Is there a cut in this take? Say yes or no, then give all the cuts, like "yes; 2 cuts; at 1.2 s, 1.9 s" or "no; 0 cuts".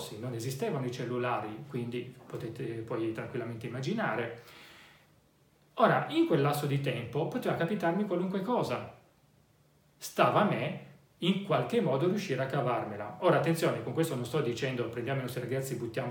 no; 0 cuts